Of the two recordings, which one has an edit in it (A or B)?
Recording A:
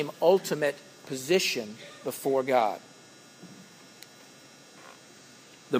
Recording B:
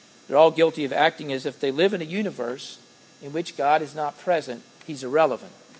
B